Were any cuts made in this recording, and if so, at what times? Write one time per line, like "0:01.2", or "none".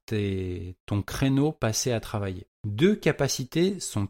0:02.5